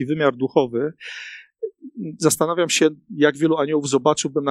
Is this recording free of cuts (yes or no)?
yes